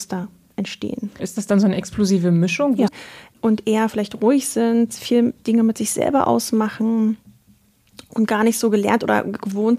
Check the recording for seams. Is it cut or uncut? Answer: cut